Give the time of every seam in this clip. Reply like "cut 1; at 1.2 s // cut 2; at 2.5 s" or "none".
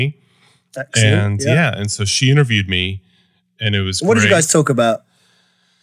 none